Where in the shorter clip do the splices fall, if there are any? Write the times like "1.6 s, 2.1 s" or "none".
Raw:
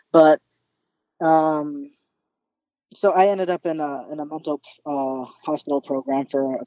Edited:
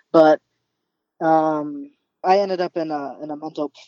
2.2 s